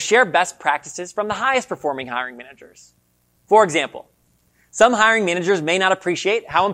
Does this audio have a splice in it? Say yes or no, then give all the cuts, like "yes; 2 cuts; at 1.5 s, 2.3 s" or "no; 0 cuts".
no; 0 cuts